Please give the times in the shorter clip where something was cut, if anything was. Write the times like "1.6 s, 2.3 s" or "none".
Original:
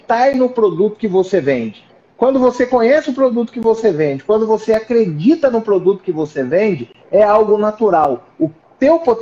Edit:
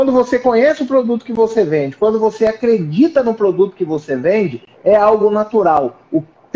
none